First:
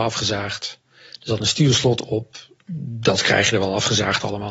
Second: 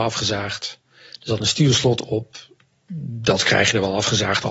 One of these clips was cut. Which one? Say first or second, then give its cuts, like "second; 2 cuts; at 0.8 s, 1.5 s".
first; 1 cut; at 2.6 s